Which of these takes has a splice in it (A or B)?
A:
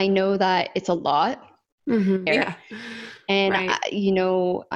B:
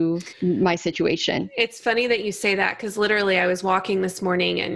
A